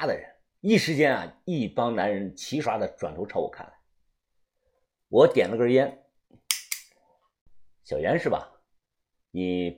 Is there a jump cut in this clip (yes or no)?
yes